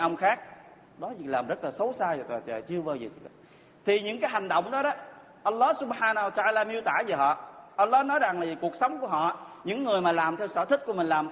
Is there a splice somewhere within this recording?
no; 0 cuts

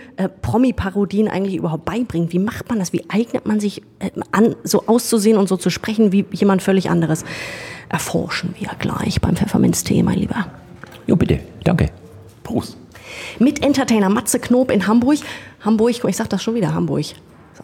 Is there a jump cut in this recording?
no; 0 cuts

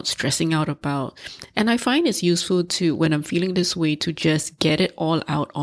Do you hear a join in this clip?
no; 0 cuts

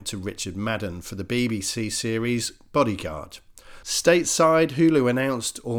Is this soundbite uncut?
no; 1 cut; at 3.8 s

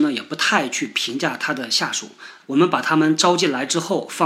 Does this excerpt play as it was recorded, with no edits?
no; 1 cut; at 2.4 s

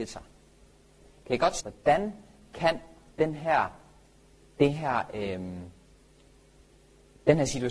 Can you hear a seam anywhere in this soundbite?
yes; 1 cut; at 1.6 s

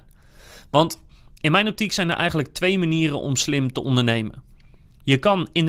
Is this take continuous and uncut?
yes; 0 cuts

